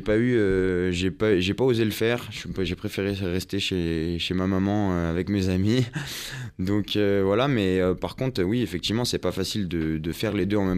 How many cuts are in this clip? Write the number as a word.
zero